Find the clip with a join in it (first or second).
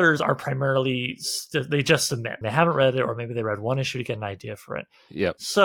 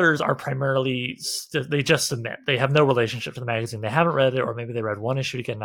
first